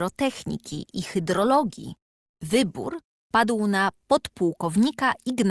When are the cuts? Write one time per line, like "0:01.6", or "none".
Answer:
0:02.3